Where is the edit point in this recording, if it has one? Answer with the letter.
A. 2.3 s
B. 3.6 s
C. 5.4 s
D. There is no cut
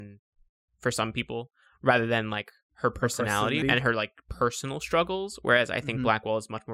B